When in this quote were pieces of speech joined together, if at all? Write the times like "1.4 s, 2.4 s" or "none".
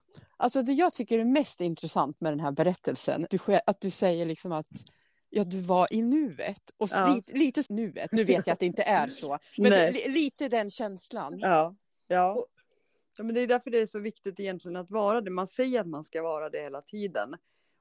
3.3 s, 7.7 s